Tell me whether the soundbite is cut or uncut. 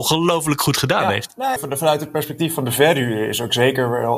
cut